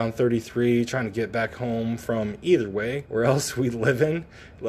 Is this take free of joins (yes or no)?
no